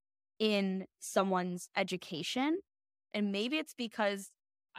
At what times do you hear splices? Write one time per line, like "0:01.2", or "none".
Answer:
0:03.1